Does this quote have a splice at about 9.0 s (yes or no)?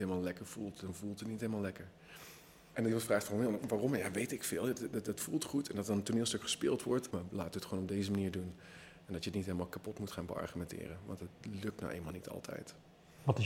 no